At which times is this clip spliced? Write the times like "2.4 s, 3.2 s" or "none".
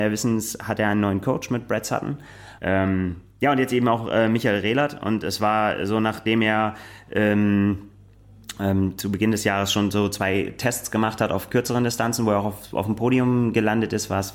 2.6 s

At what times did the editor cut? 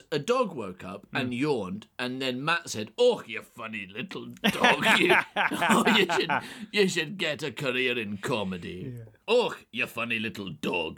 9.2 s

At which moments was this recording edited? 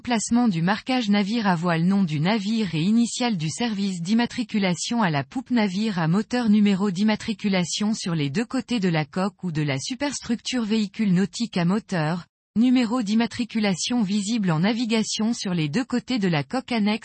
12.4 s

